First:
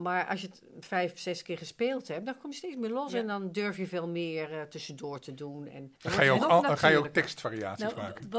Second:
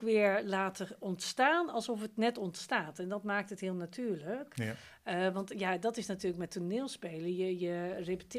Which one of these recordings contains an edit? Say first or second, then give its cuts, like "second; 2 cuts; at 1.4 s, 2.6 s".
first; 1 cut; at 6.0 s